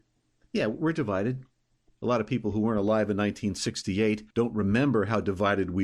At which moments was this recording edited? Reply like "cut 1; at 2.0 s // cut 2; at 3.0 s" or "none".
cut 1; at 1.9 s // cut 2; at 4.3 s